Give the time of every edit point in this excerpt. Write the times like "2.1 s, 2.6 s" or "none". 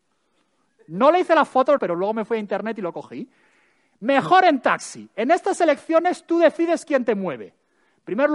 1.8 s